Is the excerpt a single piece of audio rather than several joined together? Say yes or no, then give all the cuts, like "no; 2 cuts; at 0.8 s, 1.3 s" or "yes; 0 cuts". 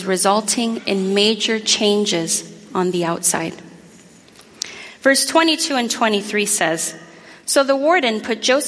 yes; 0 cuts